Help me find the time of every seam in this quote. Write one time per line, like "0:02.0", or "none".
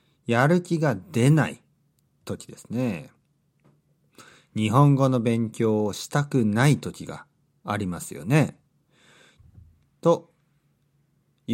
0:09.4